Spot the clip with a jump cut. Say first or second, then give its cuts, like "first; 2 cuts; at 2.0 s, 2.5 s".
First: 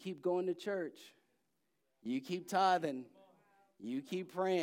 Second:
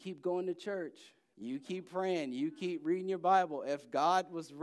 second; 1 cut; at 1.3 s